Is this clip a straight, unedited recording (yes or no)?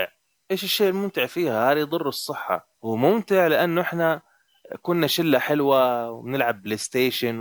no